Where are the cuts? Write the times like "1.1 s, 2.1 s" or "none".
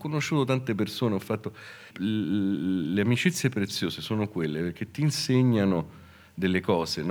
1.9 s